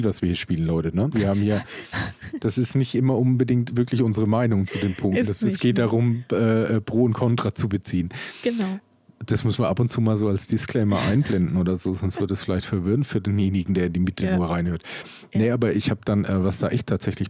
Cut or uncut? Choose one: uncut